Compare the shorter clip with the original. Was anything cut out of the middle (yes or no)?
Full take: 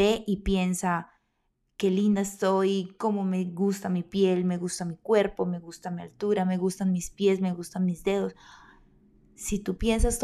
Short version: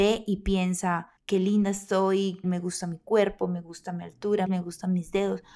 yes